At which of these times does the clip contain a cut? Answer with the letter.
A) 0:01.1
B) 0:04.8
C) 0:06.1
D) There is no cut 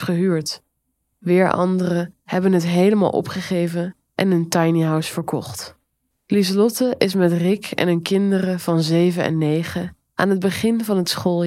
C